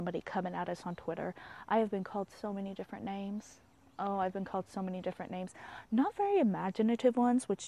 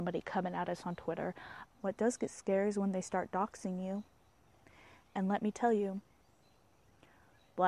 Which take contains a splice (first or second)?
second